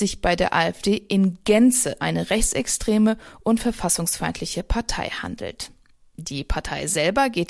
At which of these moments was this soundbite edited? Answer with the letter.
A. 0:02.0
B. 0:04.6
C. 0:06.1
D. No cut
A